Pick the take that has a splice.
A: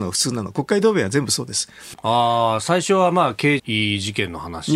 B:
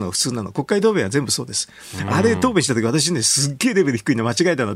A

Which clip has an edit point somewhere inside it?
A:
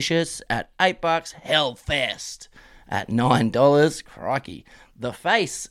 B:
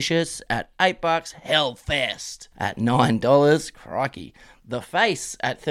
B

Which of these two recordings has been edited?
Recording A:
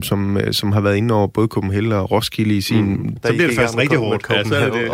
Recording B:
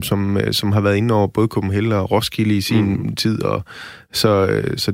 A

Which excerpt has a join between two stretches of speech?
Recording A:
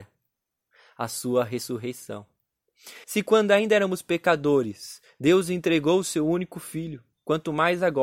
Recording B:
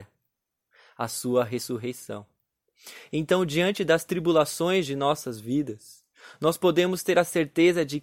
A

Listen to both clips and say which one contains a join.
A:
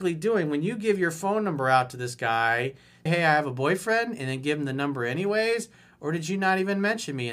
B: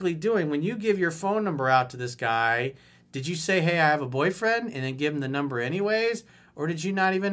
A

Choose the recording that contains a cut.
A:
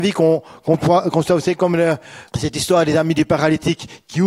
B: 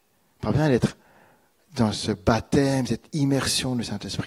A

